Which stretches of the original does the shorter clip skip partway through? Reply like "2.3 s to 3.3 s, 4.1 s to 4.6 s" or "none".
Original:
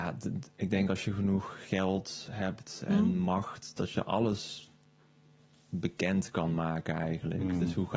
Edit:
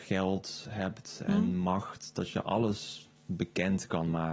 4.8 s to 5.6 s